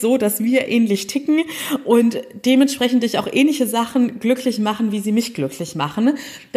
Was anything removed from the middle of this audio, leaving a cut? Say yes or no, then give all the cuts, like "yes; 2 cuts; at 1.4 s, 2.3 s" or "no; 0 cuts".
no; 0 cuts